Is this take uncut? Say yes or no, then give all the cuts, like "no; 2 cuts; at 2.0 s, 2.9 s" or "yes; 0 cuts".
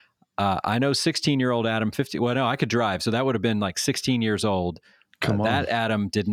yes; 0 cuts